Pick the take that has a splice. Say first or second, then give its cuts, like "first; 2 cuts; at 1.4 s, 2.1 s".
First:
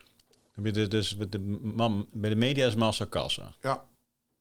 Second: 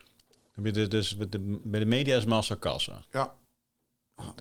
second; 1 cut; at 1.6 s